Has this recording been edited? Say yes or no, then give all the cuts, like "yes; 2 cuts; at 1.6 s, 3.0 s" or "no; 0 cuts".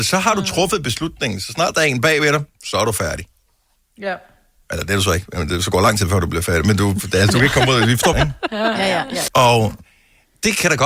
yes; 2 cuts; at 8.1 s, 9.3 s